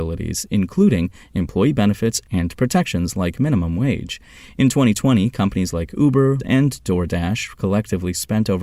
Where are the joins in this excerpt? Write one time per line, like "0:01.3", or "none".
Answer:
0:06.4